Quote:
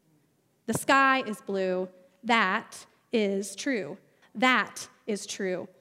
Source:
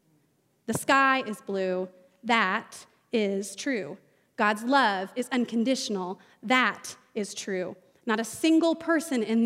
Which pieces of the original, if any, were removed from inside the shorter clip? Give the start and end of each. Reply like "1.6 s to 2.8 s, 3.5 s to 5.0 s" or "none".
4.2 s to 6.3 s